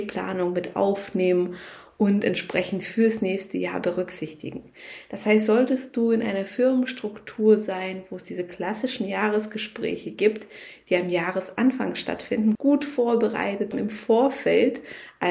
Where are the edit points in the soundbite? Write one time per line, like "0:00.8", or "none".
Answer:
0:12.6
0:13.7

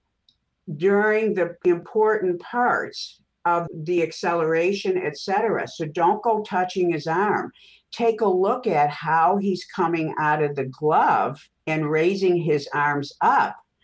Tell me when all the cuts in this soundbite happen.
0:03.7
0:11.6

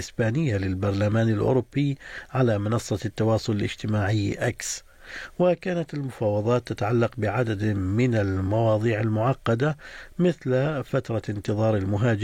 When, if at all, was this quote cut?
none

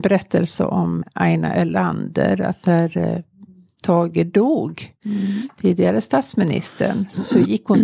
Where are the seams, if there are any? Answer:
0:01.0

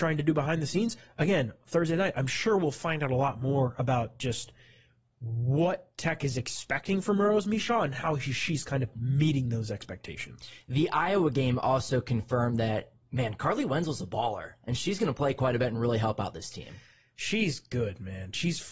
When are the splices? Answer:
none

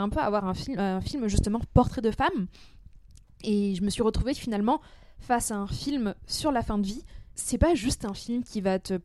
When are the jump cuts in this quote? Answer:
0:07.3

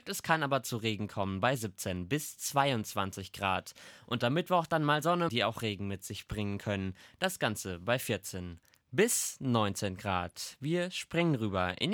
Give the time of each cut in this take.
0:05.3

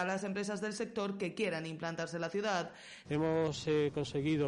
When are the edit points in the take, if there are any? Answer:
0:03.0

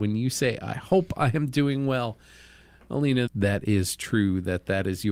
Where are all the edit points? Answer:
0:03.3

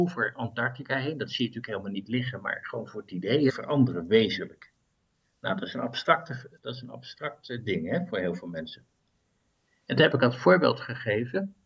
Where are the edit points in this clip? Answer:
0:03.5

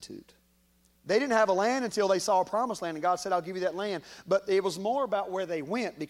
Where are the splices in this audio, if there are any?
0:00.9

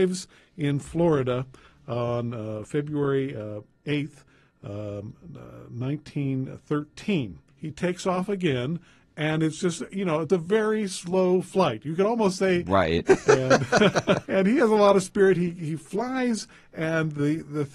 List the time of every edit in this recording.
0:07.5
0:13.1
0:14.2

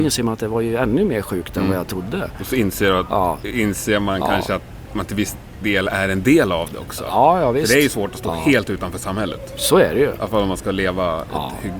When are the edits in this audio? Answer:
none

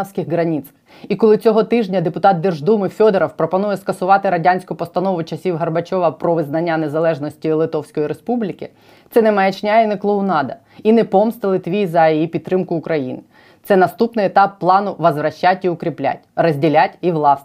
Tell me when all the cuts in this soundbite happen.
none

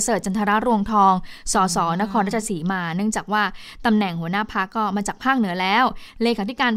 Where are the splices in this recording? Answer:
none

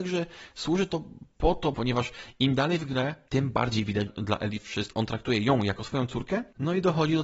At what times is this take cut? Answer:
0:01.7
0:04.1

